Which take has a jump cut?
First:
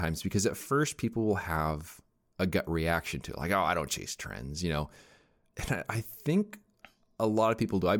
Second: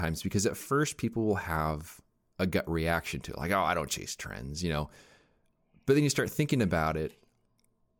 first; 1 cut; at 5.5 s

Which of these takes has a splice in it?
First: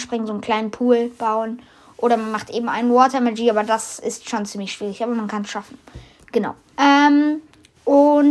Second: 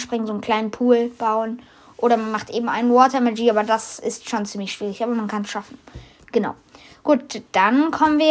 first; 1 cut; at 6.7 s

